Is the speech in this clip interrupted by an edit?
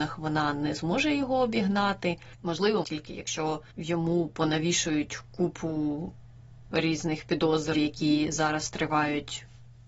yes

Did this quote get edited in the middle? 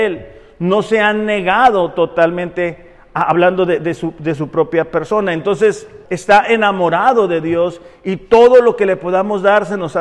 yes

